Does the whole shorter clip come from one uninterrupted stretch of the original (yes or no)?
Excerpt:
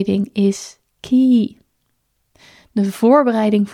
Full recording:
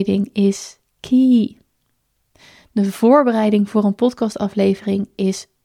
yes